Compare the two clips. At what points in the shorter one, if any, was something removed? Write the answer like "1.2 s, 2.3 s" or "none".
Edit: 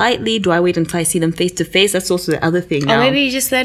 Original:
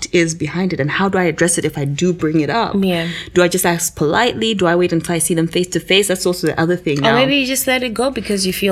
none